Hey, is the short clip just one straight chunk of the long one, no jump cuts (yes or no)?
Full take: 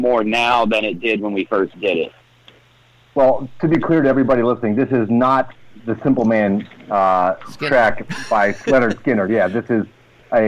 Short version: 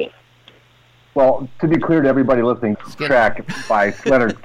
no